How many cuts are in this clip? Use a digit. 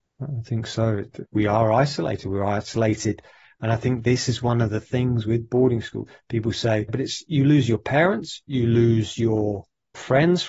1